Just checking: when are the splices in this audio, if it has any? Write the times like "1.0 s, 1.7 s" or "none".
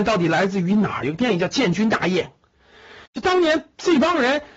1.0 s, 3.1 s